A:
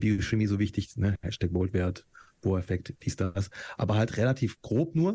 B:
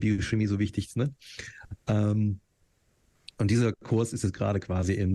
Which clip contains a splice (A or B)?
B